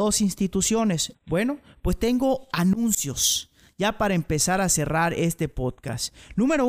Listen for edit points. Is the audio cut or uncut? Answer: cut